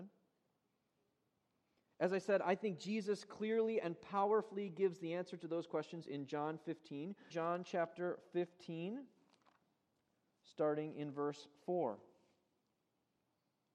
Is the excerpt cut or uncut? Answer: cut